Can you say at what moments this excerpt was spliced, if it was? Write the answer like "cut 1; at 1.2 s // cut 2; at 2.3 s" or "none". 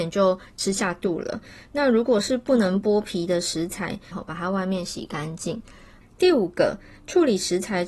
cut 1; at 4.1 s // cut 2; at 6.0 s